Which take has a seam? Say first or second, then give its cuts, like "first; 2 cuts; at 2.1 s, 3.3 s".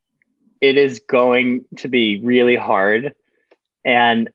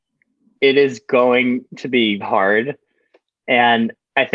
second; 1 cut; at 2.2 s